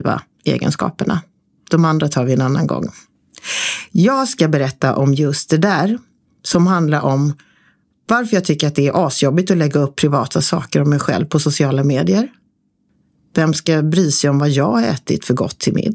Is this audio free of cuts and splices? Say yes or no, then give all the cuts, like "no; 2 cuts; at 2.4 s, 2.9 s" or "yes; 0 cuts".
yes; 0 cuts